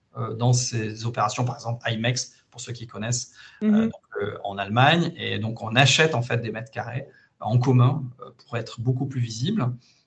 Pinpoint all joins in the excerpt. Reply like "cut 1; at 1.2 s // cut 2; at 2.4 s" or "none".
none